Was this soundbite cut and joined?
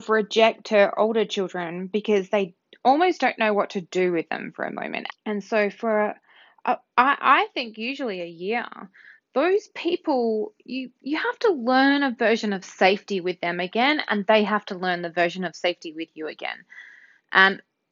yes; 1 cut; at 5.1 s

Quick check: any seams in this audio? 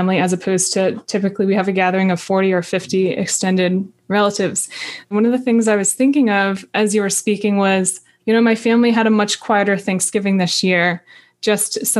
yes; 2 cuts; at 5.0 s, 8.2 s

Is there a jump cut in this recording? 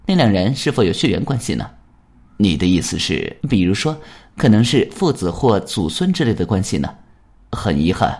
yes; 1 cut; at 3.4 s

